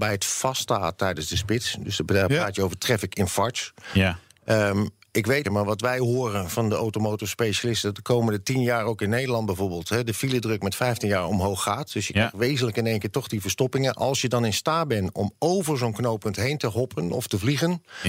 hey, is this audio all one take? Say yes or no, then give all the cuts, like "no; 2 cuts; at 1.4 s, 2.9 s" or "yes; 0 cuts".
no; 1 cut; at 5.4 s